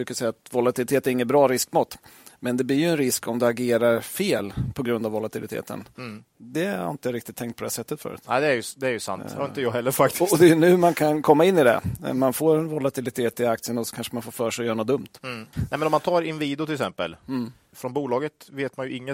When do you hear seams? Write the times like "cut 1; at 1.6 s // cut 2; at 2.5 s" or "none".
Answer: cut 1; at 15.5 s // cut 2; at 17.7 s